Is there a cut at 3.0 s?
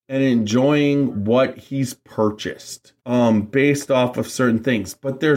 yes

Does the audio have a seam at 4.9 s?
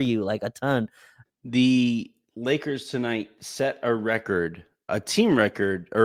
yes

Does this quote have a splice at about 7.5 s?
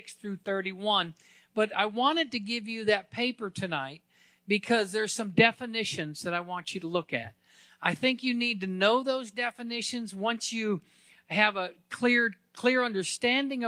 no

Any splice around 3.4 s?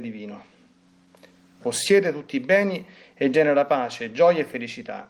no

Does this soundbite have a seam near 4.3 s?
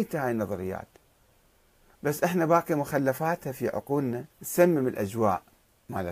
yes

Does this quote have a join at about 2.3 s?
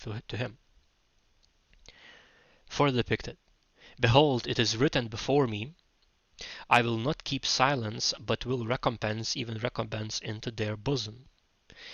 no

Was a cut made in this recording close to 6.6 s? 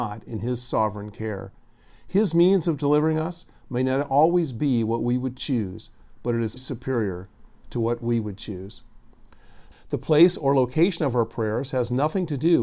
yes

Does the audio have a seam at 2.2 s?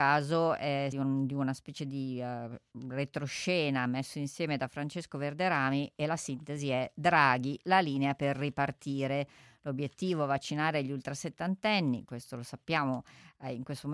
no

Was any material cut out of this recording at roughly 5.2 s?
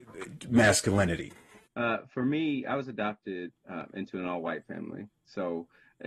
no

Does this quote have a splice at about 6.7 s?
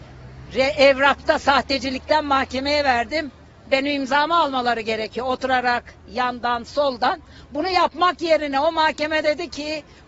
yes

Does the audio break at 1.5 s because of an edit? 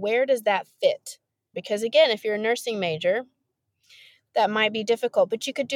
yes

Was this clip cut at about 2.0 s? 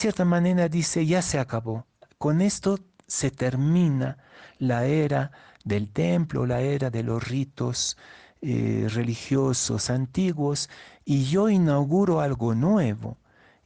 no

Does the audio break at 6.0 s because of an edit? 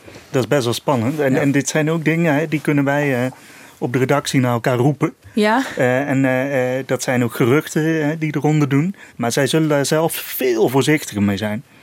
no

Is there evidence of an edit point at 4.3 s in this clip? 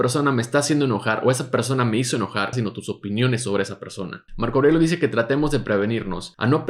yes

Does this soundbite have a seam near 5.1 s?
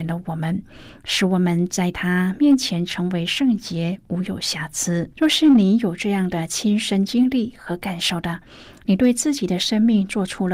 yes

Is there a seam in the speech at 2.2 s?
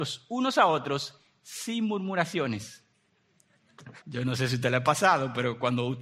no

